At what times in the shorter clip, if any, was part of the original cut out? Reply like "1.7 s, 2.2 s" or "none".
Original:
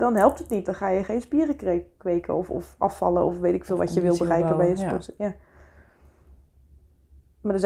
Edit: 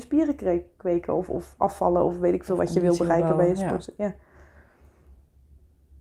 none